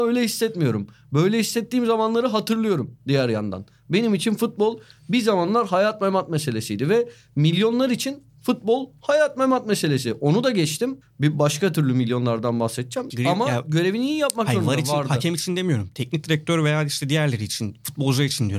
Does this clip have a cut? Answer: yes; 1 cut; at 13.1 s

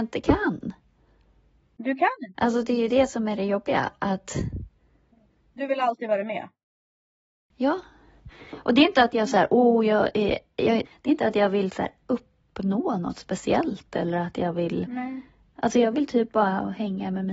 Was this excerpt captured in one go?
no; 1 cut; at 2.4 s

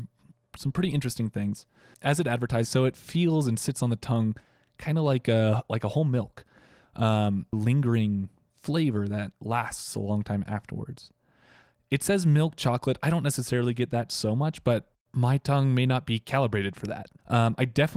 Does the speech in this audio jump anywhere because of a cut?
yes; 2 cuts; at 2.6 s, 7.5 s

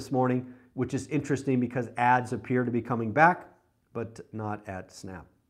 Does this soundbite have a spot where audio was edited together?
no; 0 cuts

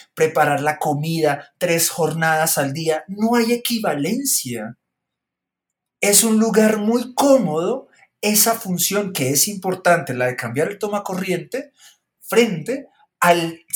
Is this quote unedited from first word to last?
yes; 0 cuts

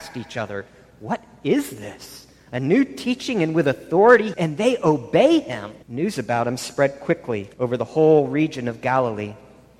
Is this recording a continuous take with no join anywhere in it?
no; 3 cuts; at 4.3 s, 5.8 s, 7.5 s

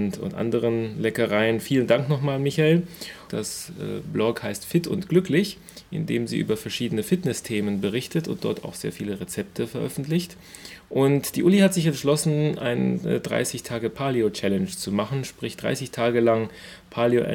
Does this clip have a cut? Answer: yes; 1 cut; at 3.3 s

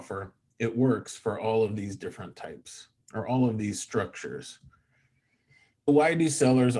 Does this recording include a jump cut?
yes; 1 cut; at 5.9 s

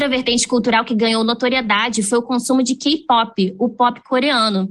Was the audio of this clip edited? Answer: no; 0 cuts

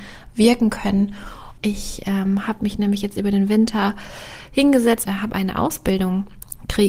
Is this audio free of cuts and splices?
no; 2 cuts; at 1.6 s, 5.1 s

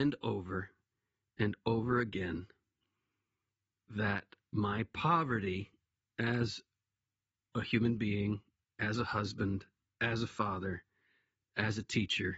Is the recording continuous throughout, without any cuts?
yes; 0 cuts

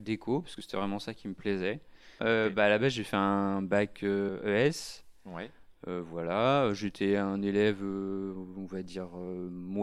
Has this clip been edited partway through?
yes; 1 cut; at 2.2 s

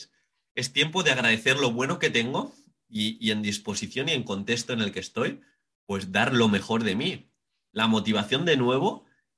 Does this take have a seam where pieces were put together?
no; 0 cuts

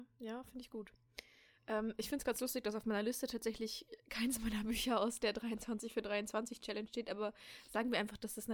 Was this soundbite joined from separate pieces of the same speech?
no; 0 cuts

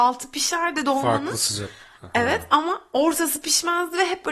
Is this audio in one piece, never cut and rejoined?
yes; 0 cuts

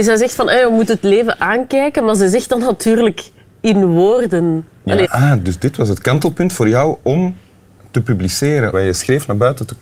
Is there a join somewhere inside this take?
yes; 2 cuts; at 5.0 s, 8.7 s

